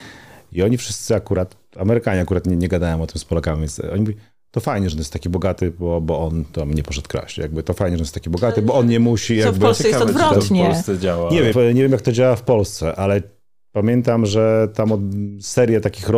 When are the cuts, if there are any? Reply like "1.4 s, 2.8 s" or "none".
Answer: 11.5 s